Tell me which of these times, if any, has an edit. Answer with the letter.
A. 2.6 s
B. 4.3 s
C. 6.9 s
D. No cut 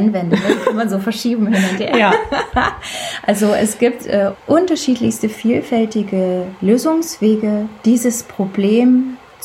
B